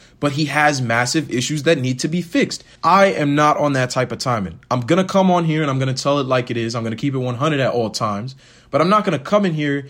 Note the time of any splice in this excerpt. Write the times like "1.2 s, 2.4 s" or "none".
2.8 s